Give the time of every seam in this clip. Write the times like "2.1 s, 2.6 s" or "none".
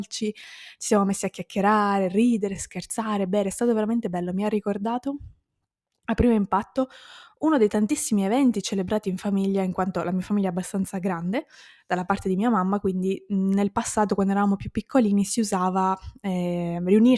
none